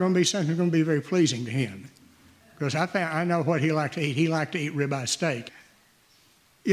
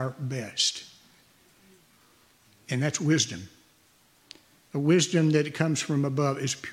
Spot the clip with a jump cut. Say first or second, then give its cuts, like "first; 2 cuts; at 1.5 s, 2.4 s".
first; 1 cut; at 5.5 s